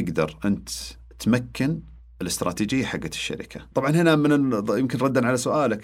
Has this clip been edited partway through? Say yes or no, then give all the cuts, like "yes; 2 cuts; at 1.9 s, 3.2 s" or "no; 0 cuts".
no; 0 cuts